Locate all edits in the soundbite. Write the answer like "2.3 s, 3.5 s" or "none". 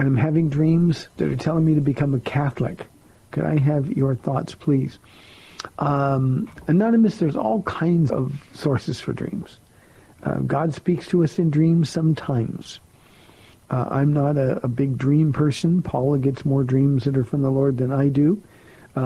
8.1 s

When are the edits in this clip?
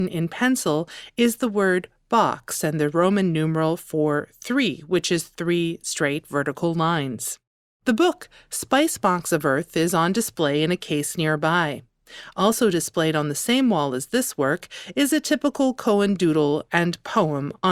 none

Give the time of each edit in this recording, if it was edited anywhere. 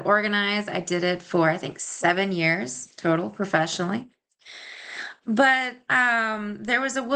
none

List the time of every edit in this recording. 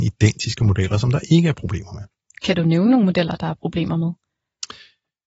none

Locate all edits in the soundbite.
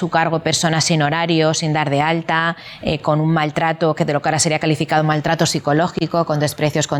none

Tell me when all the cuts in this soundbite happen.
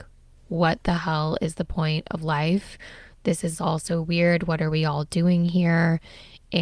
none

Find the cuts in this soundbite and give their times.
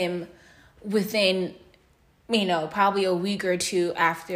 none

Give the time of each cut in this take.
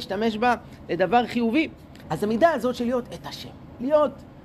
2.0 s

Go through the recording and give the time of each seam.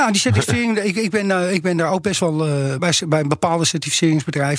2.8 s

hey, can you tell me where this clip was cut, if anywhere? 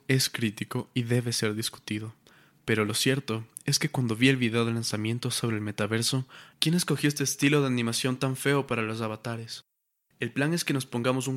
6.5 s

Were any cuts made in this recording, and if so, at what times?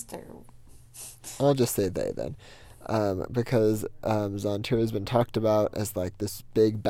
none

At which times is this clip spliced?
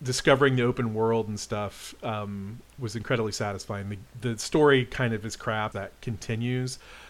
5.7 s

